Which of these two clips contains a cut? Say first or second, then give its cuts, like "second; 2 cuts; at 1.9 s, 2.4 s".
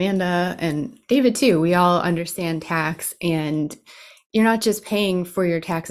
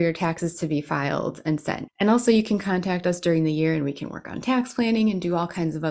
second; 1 cut; at 1.9 s